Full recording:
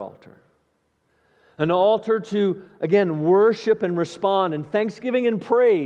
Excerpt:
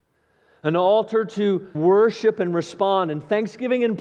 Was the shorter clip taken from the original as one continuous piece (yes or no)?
no